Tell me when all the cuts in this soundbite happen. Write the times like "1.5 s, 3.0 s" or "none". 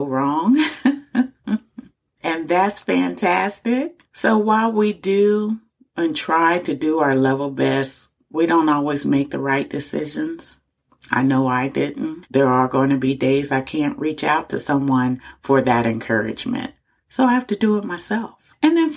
12.3 s